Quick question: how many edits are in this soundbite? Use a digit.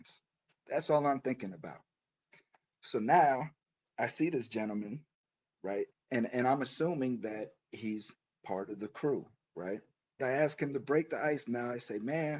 2